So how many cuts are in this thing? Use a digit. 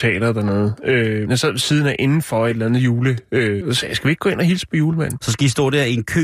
3